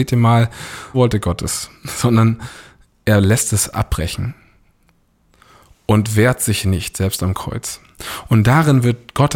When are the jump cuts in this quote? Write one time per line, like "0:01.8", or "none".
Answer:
0:00.9